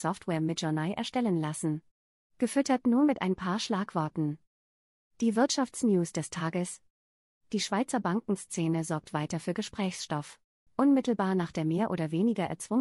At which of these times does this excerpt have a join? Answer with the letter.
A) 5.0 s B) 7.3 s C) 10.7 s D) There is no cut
C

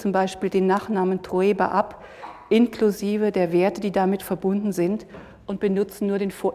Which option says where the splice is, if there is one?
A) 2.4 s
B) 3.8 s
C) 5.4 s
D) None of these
D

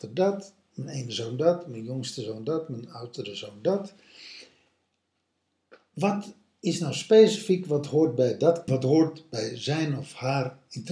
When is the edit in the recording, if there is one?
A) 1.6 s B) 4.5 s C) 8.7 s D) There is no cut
C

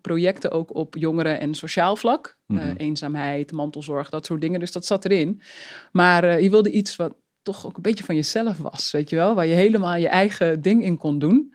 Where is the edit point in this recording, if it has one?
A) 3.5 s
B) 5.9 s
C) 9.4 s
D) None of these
D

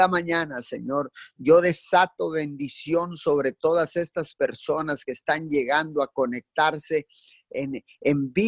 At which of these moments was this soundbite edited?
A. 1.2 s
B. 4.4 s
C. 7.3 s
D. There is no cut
D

